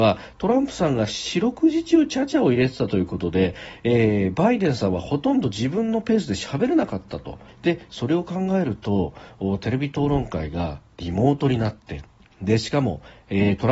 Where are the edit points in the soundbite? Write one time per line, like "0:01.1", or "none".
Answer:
0:07.5